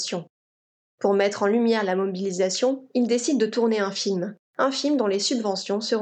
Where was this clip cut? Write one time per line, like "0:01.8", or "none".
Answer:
0:04.4